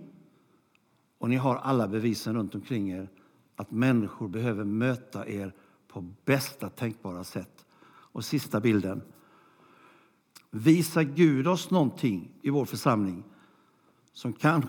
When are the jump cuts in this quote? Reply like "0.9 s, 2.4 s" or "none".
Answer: 10.4 s